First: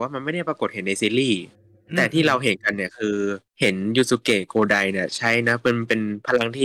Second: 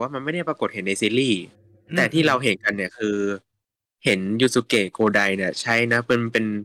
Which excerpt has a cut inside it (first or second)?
first